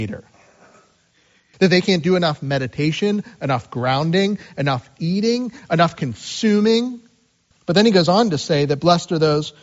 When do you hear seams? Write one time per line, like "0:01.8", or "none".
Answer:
0:01.5
0:07.5